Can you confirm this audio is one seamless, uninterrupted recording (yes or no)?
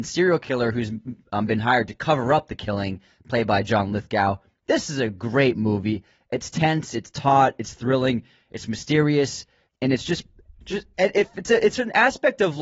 no